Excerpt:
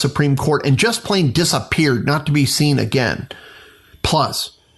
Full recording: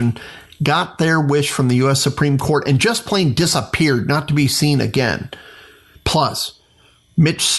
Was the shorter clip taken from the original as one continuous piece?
yes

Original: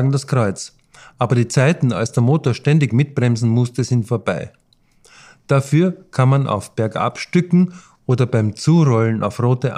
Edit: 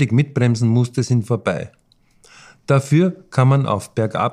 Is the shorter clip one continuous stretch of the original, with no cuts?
yes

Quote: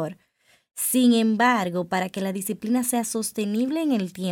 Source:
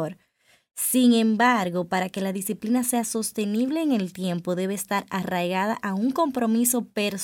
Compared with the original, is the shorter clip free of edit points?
yes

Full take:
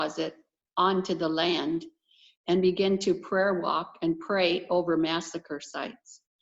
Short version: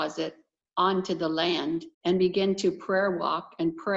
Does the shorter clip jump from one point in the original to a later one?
yes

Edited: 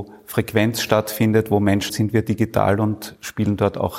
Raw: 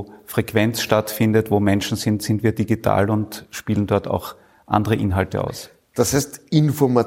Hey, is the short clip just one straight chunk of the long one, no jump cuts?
no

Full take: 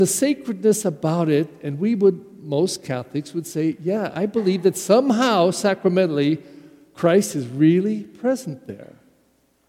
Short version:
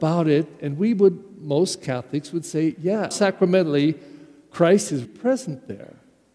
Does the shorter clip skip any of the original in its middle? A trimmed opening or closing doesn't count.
yes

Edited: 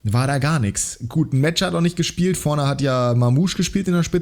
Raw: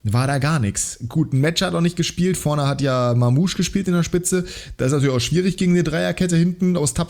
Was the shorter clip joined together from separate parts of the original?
no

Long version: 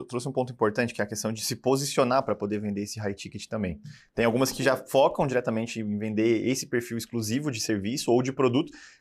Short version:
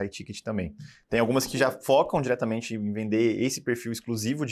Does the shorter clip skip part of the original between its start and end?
no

